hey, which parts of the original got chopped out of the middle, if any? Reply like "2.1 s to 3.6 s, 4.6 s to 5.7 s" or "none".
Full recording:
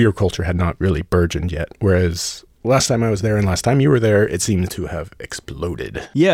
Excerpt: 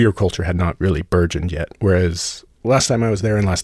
none